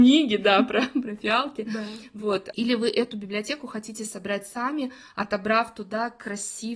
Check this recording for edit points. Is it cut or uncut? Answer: uncut